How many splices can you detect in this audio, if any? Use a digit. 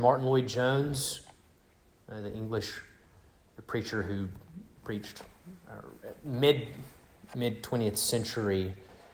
0